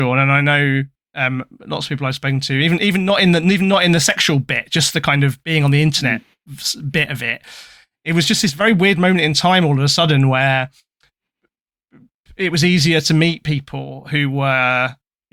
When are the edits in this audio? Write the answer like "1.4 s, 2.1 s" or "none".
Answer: none